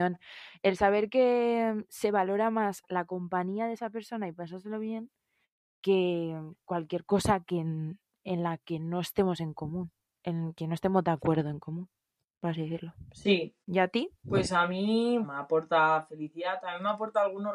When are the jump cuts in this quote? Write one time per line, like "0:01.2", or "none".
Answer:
0:13.6
0:15.2

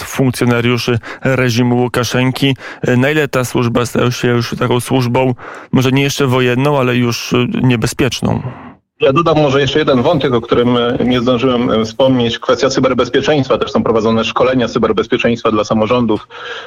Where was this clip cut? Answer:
none

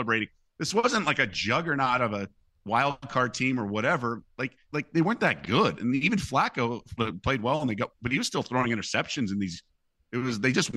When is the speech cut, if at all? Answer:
0:04.6
0:07.0

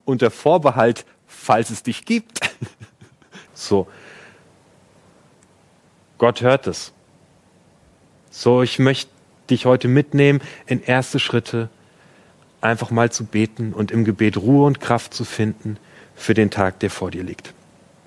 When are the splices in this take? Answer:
0:03.5
0:08.2

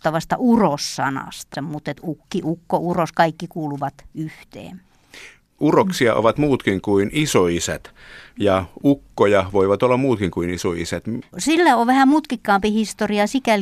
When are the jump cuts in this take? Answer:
0:01.5
0:11.2

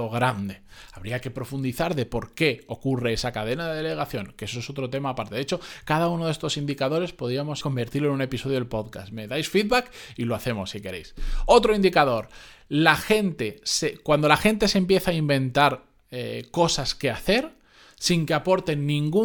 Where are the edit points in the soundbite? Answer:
0:07.6

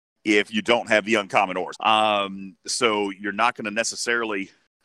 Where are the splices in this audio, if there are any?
0:01.7

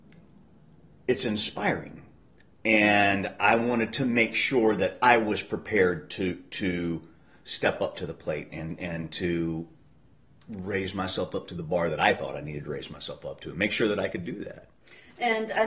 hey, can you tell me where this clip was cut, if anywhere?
none

